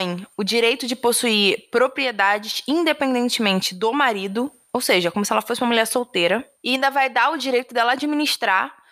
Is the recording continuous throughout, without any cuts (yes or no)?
yes